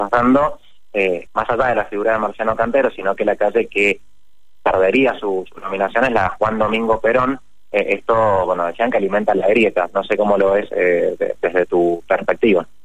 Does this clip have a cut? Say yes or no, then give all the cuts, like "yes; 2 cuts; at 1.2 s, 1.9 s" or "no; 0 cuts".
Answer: yes; 1 cut; at 1.3 s